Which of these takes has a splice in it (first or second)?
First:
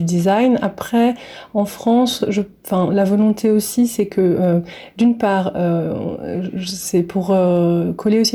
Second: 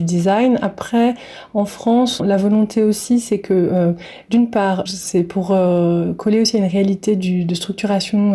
second